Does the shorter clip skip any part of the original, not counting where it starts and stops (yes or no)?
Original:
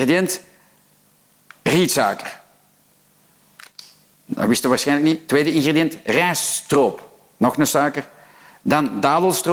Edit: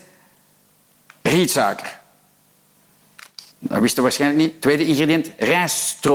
yes